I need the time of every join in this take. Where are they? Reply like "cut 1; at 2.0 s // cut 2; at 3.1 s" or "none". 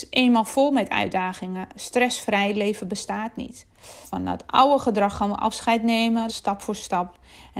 cut 1; at 4.0 s // cut 2; at 6.3 s